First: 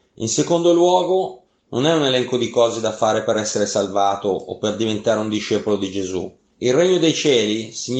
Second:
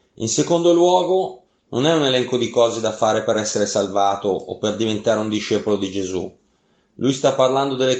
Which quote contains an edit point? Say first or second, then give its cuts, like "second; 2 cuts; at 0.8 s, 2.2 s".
first; 1 cut; at 6.5 s